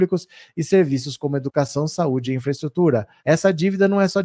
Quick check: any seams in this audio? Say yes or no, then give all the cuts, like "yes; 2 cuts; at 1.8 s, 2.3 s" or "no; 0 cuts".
yes; 1 cut; at 3.2 s